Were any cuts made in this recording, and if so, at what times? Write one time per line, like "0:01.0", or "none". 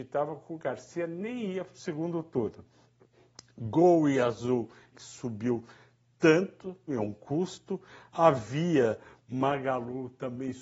0:04.9
0:06.9

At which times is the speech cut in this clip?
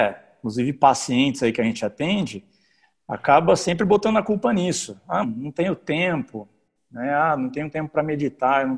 0:05.2

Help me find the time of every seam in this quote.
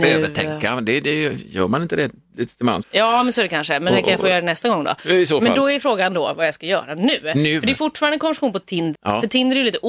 0:02.8
0:08.9

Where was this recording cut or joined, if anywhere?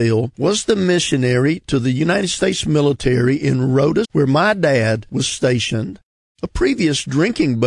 0:04.0

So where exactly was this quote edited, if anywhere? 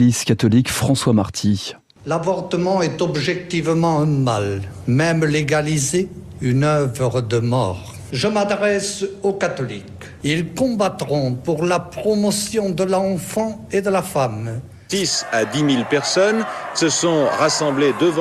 0:06.4

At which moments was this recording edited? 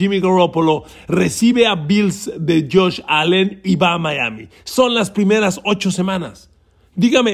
none

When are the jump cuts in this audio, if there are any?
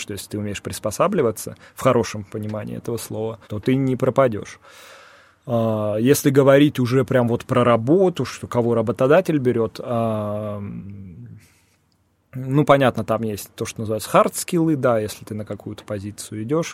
0:03.4

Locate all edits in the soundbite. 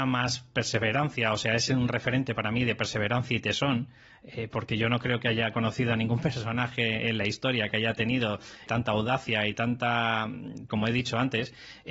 0:10.7

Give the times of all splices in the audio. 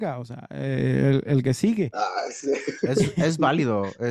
none

